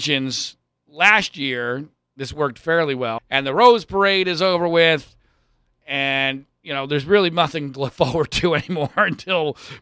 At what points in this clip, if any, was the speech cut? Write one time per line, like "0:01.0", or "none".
0:03.2